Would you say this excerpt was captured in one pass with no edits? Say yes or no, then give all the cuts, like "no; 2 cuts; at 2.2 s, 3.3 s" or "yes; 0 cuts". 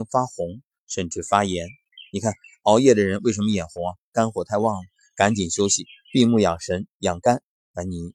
yes; 0 cuts